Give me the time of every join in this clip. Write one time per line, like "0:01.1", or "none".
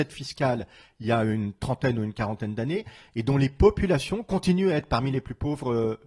none